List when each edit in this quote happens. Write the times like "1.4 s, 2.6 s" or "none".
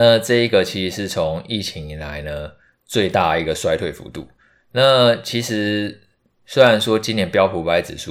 none